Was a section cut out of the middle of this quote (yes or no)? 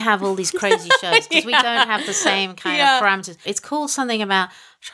yes